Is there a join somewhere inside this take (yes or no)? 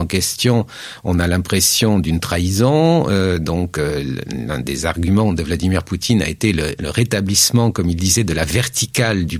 no